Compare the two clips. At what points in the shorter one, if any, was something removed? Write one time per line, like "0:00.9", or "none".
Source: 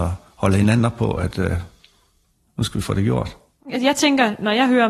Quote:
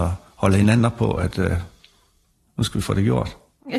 none